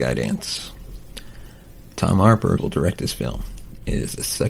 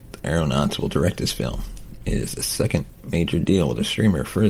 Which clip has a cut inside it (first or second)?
first